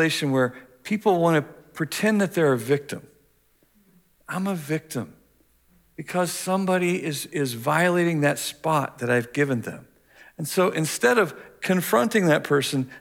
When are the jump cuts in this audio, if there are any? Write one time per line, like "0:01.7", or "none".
0:07.3